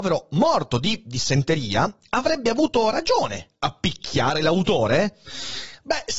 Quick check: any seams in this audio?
no; 0 cuts

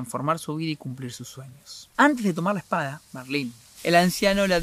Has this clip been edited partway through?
yes; 2 cuts; at 1.9 s, 3.0 s

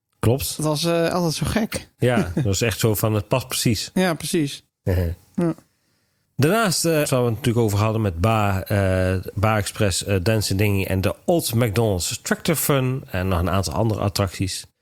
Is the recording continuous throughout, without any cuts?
no; 1 cut; at 7.0 s

